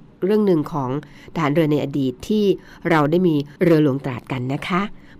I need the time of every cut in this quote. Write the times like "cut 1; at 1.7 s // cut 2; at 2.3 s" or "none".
cut 1; at 3.6 s